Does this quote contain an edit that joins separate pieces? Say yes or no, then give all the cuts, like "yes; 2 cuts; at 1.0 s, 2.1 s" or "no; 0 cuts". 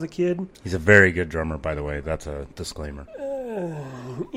no; 0 cuts